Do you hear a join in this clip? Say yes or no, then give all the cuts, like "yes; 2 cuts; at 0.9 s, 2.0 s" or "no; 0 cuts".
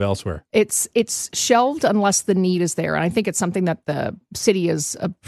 yes; 1 cut; at 0.9 s